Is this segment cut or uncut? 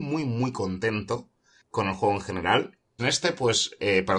cut